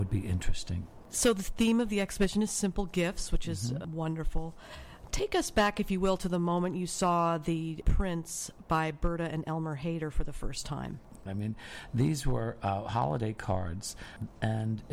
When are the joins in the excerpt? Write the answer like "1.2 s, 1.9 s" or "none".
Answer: 11.3 s

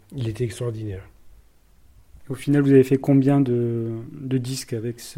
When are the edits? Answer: none

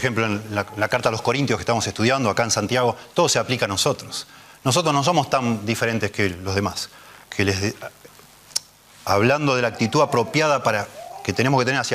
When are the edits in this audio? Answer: 7.2 s

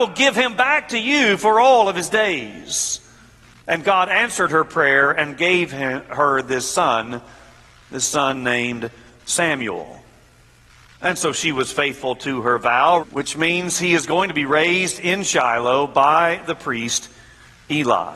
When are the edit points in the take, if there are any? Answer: 13.0 s

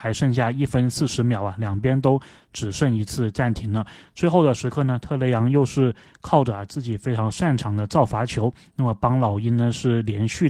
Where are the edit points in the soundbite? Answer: none

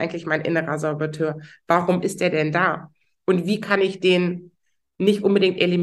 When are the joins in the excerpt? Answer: none

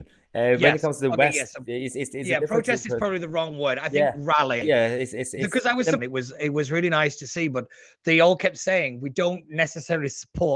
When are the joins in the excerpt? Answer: 4.6 s, 6.0 s

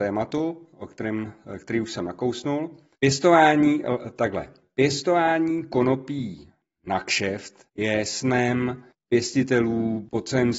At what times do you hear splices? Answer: 3.0 s, 7.7 s

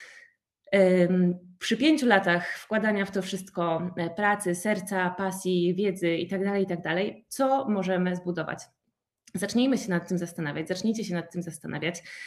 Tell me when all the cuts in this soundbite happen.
none

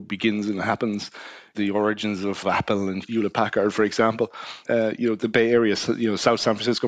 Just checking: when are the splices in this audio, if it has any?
4.7 s

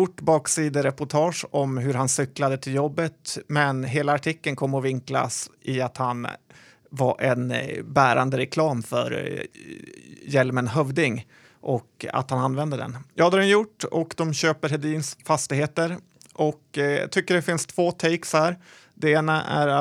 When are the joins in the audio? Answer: 13.1 s

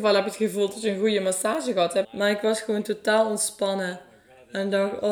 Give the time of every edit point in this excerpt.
2.0 s

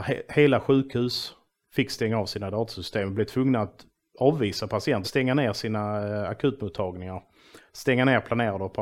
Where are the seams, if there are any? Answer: 5.0 s

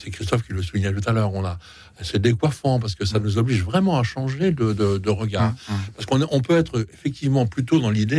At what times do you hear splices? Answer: none

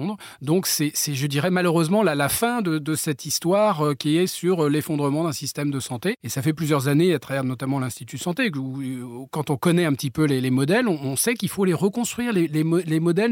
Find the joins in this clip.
none

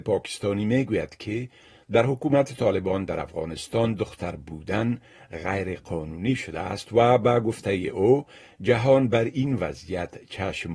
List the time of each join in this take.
none

